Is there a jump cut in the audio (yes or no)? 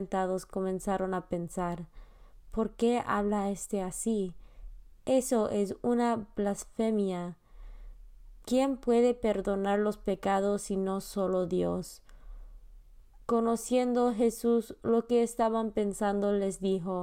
no